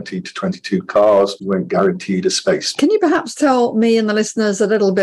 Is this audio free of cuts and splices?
no; 1 cut; at 2.8 s

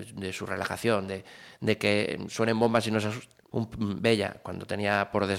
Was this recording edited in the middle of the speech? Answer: yes; 1 cut; at 3.5 s

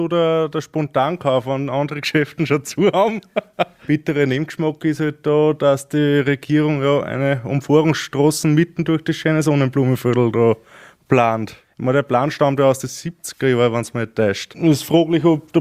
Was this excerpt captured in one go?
yes; 0 cuts

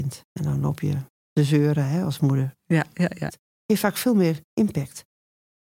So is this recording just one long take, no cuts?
no; 1 cut; at 3.3 s

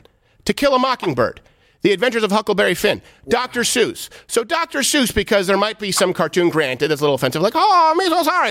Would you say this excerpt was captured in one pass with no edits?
yes; 0 cuts

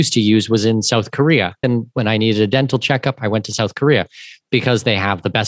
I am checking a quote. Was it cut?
yes; 1 cut; at 1.6 s

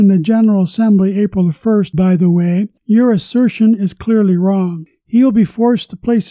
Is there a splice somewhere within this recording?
yes; 1 cut; at 1.9 s

